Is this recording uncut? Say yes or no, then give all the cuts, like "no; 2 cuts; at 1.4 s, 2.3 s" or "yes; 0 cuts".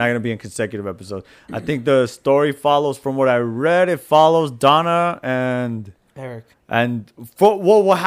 no; 1 cut; at 6.5 s